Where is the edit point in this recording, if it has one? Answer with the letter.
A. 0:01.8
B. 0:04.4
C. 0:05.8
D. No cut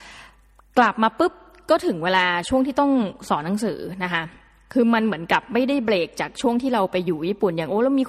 D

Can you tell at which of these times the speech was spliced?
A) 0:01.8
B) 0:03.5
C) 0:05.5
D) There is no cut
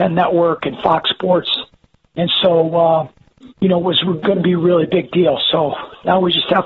B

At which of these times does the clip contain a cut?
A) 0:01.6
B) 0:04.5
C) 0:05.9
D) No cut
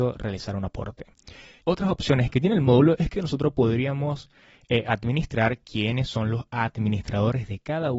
A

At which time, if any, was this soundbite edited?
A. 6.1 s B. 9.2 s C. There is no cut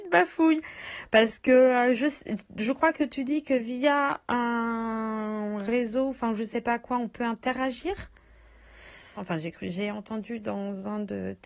B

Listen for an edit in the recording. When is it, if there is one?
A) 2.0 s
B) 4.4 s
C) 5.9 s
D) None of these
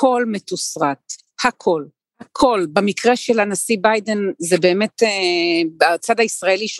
A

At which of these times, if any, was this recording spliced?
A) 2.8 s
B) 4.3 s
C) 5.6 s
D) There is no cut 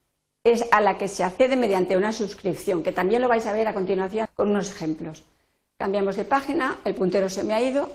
B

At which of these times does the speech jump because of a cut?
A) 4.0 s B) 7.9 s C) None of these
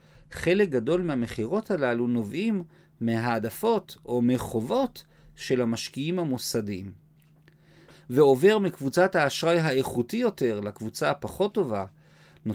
B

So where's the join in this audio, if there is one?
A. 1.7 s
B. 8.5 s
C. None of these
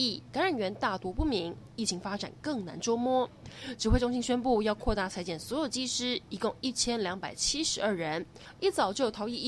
A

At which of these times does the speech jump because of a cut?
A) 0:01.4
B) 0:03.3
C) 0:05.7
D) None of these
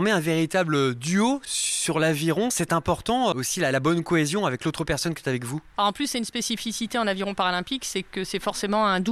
B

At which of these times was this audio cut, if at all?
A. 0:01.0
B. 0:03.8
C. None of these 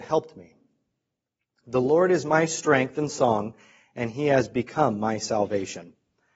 C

